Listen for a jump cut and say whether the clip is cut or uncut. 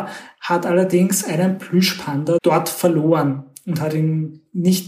cut